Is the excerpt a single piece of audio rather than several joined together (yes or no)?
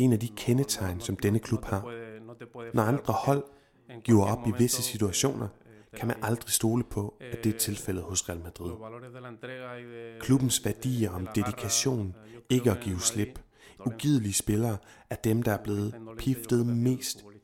no